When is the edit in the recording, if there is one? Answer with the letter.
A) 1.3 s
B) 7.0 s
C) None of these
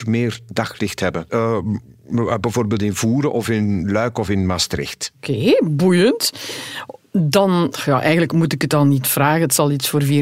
A